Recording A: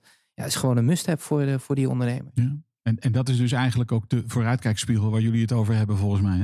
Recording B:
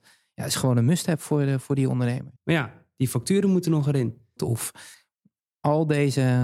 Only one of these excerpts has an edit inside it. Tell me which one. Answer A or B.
B